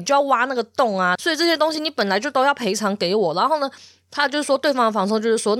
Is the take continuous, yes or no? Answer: no